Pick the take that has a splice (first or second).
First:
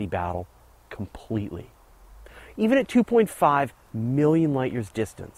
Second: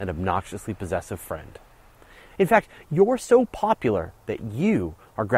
second